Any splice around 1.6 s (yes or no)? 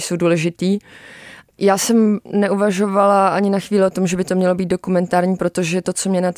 yes